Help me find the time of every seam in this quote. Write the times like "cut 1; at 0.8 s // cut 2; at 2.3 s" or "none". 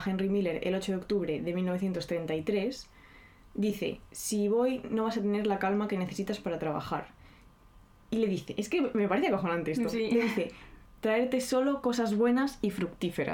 cut 1; at 10.9 s